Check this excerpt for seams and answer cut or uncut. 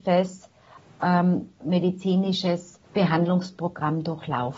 cut